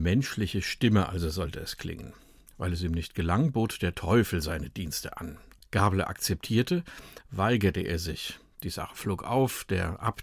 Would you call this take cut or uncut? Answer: cut